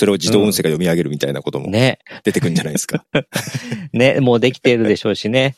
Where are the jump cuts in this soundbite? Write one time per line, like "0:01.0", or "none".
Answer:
none